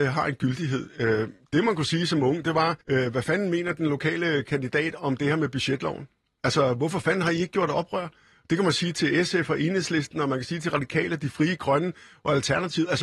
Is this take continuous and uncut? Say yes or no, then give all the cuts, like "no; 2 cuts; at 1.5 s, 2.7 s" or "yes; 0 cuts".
no; 1 cut; at 2.8 s